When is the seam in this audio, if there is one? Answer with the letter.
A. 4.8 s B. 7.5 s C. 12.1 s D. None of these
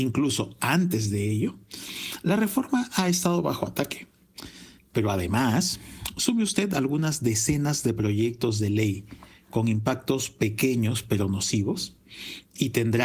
A